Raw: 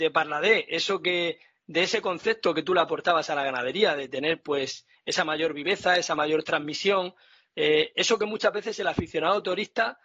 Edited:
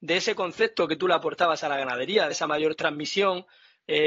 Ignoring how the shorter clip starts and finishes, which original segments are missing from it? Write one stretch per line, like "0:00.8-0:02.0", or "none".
0:04.0-0:06.0